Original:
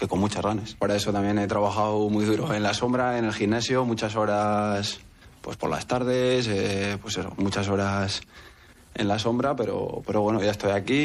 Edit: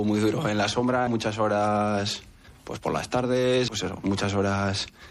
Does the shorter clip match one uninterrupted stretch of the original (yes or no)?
no